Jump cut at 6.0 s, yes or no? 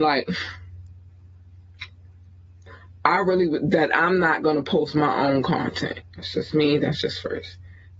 yes